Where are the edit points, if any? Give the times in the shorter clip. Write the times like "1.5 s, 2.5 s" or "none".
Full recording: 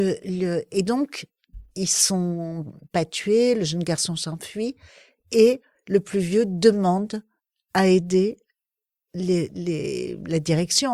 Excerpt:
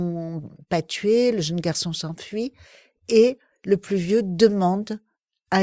none